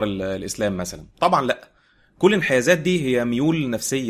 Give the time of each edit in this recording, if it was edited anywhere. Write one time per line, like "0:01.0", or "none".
0:01.1